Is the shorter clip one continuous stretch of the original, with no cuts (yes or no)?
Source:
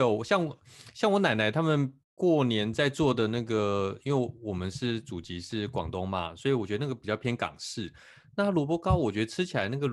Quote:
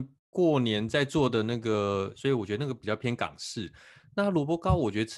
no